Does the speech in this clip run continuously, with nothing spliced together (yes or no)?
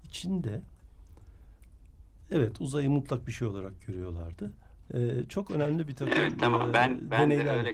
no